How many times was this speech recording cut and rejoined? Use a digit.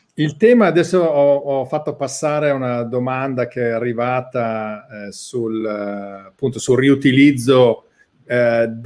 0